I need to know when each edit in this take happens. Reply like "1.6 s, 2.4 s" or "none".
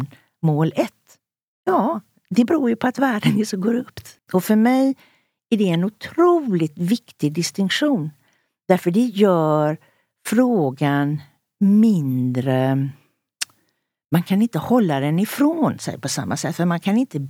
4.2 s